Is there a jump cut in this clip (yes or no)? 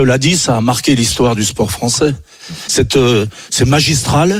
yes